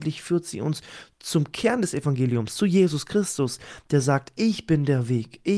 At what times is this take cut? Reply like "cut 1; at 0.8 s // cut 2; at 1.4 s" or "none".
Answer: none